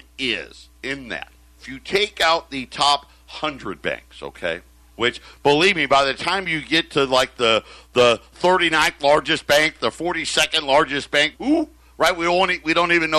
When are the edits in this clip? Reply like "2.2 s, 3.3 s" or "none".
11.3 s